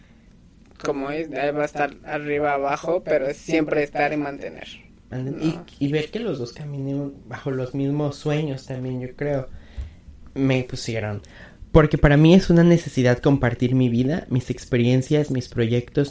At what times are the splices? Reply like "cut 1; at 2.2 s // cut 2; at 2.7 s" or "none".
none

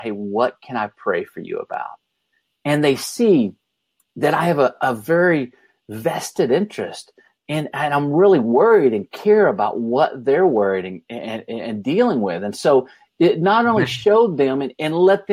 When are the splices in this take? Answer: none

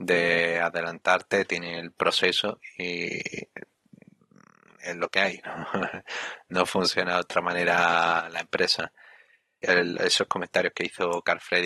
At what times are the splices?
cut 1; at 9.6 s

